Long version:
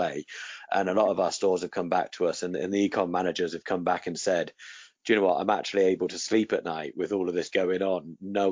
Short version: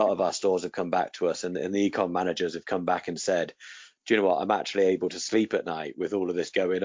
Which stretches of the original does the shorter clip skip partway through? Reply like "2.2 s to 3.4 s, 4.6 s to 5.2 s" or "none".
none